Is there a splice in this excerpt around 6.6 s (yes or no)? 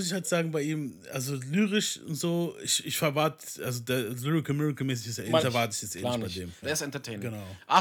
yes